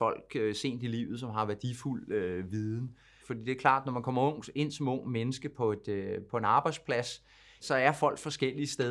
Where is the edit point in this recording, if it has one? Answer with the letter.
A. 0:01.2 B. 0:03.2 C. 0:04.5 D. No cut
B